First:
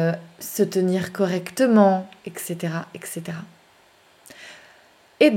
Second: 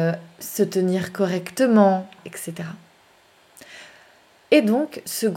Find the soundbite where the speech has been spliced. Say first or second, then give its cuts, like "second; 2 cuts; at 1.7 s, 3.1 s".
second; 1 cut; at 2.2 s